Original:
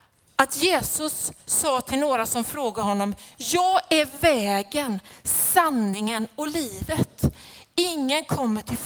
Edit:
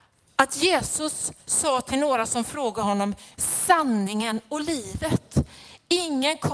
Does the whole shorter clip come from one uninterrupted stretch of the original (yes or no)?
no